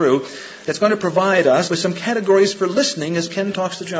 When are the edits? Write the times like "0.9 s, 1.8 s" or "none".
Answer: 1.7 s